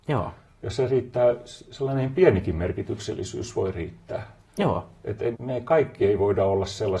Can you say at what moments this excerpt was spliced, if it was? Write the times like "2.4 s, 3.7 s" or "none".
5.3 s

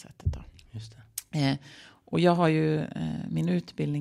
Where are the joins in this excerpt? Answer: none

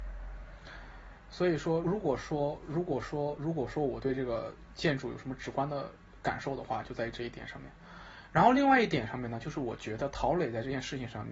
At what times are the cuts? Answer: 1.8 s

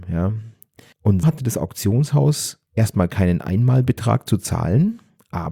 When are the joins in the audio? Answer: 1.2 s, 2.7 s

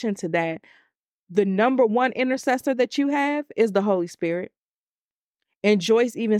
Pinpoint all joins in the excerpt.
none

